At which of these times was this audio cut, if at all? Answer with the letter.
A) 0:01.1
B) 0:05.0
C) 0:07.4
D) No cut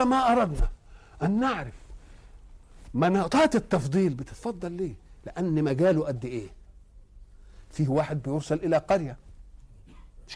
D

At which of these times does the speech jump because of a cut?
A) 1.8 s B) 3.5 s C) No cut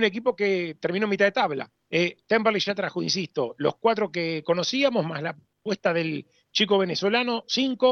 A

